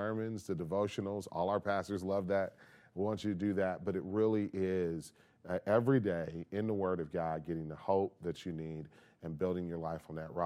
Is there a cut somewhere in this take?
no; 0 cuts

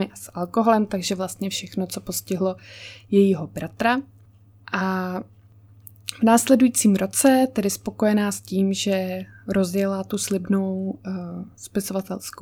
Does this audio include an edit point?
no; 0 cuts

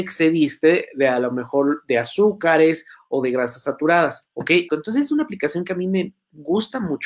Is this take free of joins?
no; 1 cut; at 4.7 s

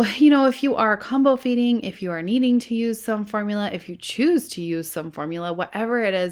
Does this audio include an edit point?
no; 0 cuts

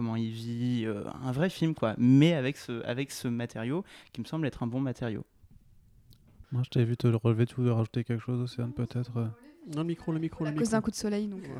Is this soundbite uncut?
no; 1 cut; at 6.4 s

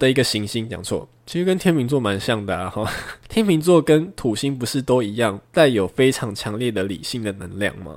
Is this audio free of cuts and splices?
no; 1 cut; at 1.2 s

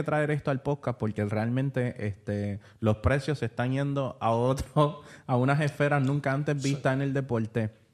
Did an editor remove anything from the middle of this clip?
no; 0 cuts

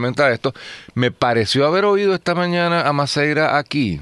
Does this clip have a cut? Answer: no; 0 cuts

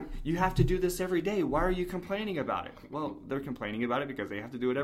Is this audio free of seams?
yes; 0 cuts

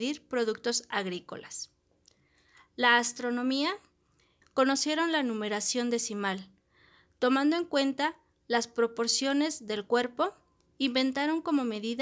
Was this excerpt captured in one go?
no; 1 cut; at 4.4 s

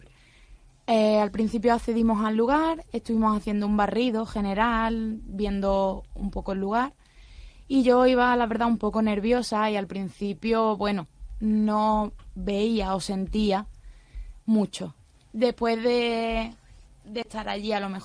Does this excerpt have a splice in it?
no; 0 cuts

